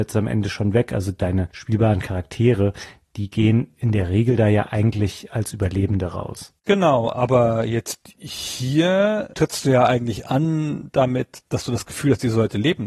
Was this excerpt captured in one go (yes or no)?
yes